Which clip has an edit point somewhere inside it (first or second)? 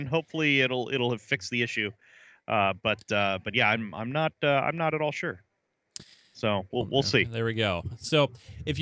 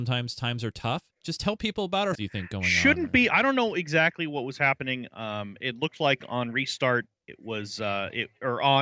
second